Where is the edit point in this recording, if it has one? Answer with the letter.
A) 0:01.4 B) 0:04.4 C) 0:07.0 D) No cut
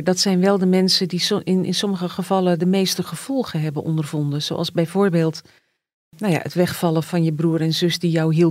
C